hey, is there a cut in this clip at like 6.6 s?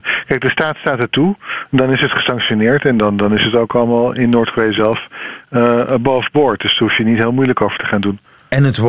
no; 0 cuts

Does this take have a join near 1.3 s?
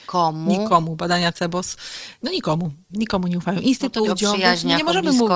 no; 2 cuts; at 2.9 s, 4.1 s

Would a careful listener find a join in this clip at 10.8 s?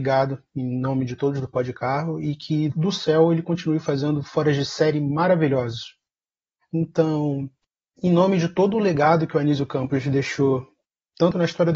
no; 1 cut; at 6.6 s

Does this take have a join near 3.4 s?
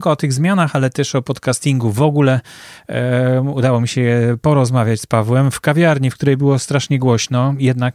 no; 0 cuts

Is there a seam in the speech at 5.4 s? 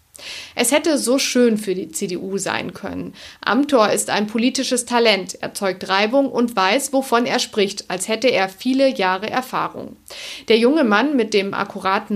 no; 0 cuts

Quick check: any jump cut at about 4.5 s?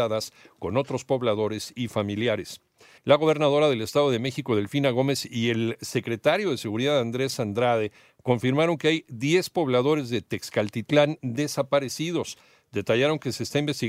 no; 1 cut; at 3.0 s

